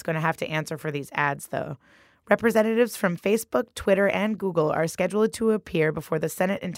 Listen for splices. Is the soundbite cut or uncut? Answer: uncut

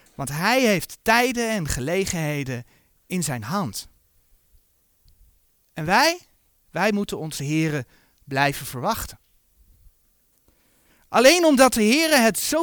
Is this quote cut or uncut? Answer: uncut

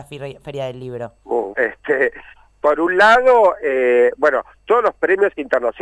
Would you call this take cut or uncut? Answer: cut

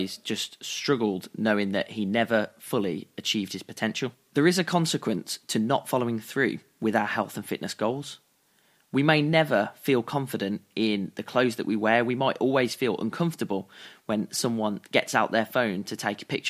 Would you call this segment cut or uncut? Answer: uncut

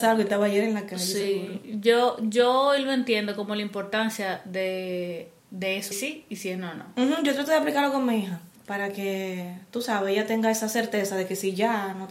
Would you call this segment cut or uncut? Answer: cut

